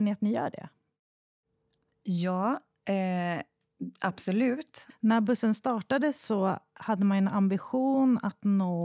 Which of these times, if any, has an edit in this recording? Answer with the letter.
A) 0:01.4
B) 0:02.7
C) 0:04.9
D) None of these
C